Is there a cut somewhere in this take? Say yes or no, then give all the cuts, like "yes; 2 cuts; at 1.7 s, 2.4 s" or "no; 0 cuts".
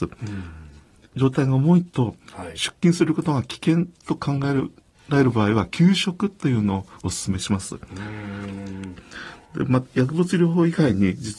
yes; 2 cuts; at 1.1 s, 9.0 s